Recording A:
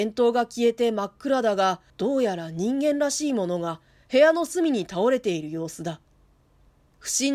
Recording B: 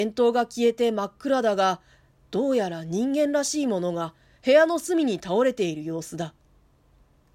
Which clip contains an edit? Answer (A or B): A